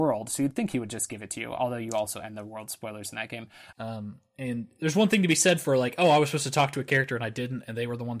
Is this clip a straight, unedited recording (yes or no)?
no